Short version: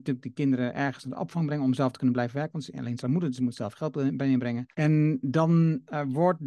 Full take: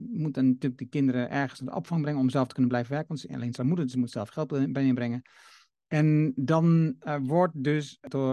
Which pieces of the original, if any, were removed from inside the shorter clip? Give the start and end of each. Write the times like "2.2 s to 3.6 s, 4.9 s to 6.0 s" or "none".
5.3 s to 5.9 s